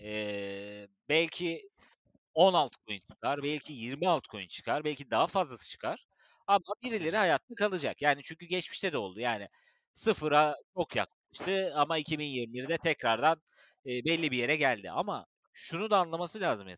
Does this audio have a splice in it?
no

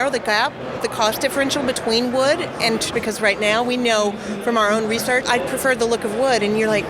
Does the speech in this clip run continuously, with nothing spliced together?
no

